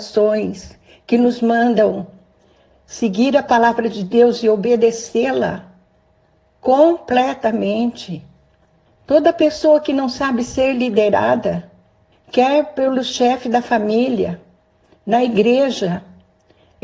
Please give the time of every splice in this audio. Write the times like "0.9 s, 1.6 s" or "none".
8.9 s, 12.1 s, 14.9 s